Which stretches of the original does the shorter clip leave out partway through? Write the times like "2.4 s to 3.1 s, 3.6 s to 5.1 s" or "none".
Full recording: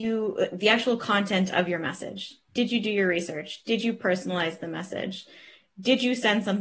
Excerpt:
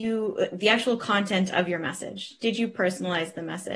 2.4 s to 3.6 s